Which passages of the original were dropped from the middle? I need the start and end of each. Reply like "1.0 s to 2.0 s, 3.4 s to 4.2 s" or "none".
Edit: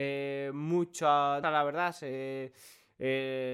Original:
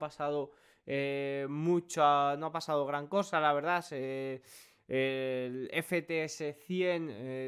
2.4 s to 3.3 s